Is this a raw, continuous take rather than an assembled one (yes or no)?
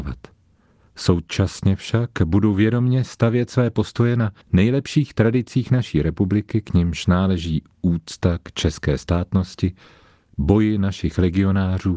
no